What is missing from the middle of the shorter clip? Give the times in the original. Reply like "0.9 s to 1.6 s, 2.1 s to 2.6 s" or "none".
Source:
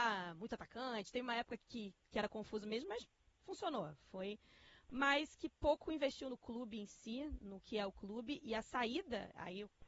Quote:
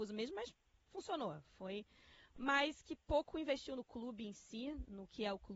none